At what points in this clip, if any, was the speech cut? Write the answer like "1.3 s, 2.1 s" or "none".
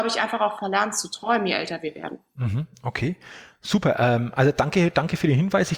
none